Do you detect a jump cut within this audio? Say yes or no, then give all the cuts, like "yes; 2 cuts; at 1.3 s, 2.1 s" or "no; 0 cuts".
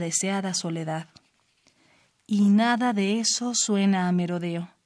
no; 0 cuts